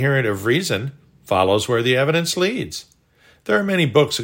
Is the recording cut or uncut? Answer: uncut